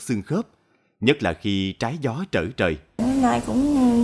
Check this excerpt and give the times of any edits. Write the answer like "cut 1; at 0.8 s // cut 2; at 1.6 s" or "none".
cut 1; at 3.0 s